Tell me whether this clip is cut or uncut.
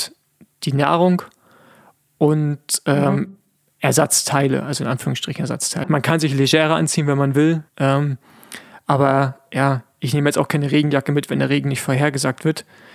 cut